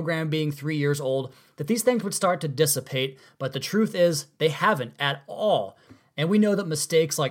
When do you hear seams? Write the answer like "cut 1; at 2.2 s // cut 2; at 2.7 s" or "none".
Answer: none